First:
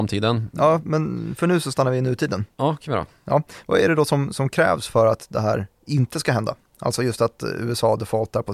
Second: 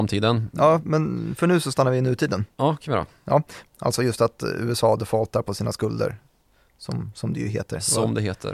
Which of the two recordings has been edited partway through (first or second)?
second